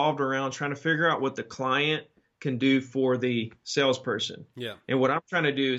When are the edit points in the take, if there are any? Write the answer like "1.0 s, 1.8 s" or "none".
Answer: none